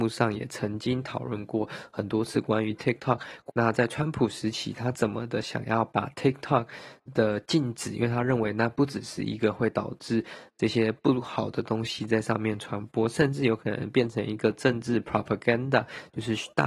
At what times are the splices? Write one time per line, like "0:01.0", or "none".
0:03.5